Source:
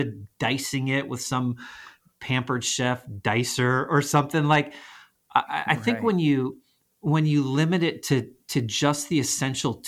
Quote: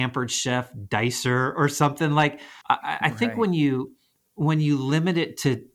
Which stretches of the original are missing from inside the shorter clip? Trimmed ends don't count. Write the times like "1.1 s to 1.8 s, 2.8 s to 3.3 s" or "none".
4.9 s to 5.3 s